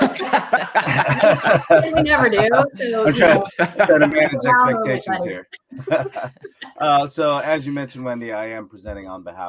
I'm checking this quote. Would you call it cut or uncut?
uncut